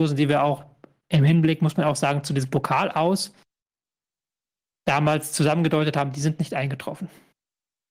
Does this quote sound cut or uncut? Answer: uncut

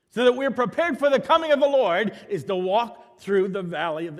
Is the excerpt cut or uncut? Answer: uncut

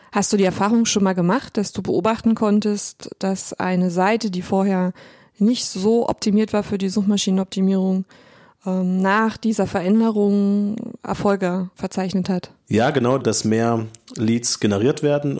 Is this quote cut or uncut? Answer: cut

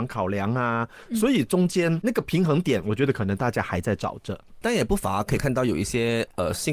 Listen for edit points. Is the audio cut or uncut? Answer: cut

